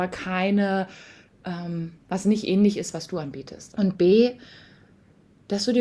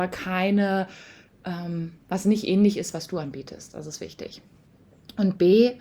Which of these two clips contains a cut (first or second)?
first